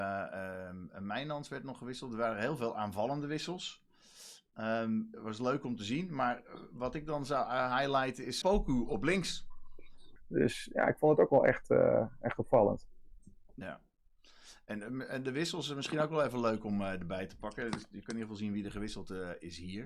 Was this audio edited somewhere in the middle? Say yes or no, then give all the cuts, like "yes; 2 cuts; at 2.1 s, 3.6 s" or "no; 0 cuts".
yes; 2 cuts; at 8.4 s, 10.2 s